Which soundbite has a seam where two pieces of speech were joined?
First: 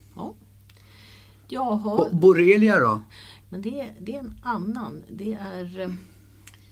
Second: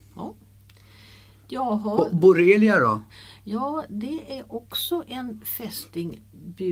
first; 1 cut; at 3.4 s

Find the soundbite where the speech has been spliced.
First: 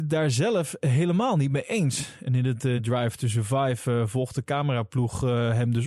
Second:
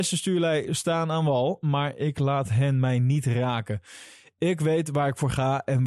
first; 1 cut; at 2.8 s

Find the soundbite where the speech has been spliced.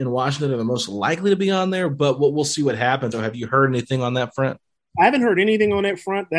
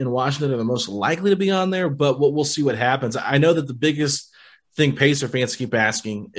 first; 1 cut; at 3.1 s

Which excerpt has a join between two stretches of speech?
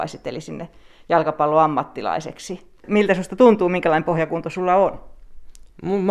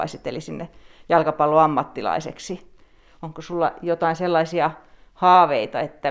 first; 1 cut; at 2.8 s

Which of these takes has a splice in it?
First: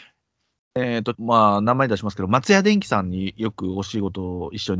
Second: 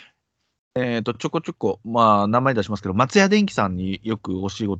first; 1 cut; at 1.1 s

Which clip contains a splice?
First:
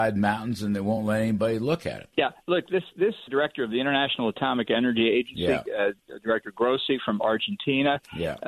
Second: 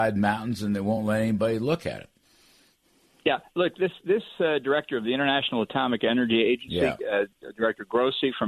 first; 2 cuts; at 2.1 s, 3.3 s

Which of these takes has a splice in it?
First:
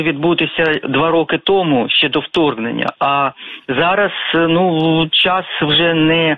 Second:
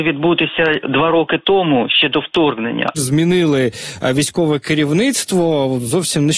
second; 1 cut; at 2.9 s

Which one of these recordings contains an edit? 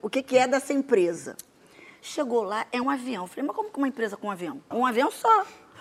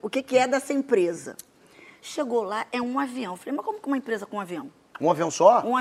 first; 2 cuts; at 2.8 s, 4.7 s

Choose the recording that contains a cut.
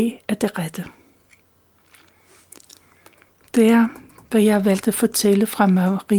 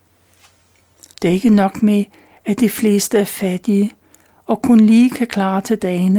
second; 1 cut; at 1.1 s

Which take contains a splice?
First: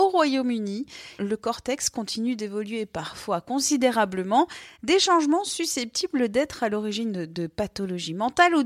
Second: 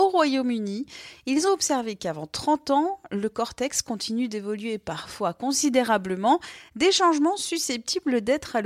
first; 1 cut; at 1.2 s

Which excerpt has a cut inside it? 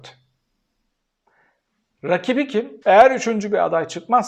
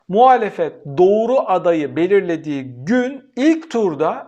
first; 1 cut; at 2.8 s

